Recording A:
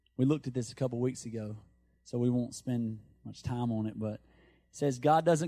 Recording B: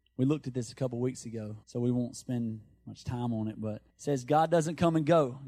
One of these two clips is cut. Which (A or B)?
B